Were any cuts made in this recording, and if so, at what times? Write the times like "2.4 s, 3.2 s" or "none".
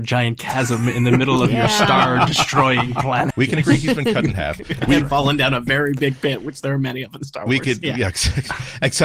3.3 s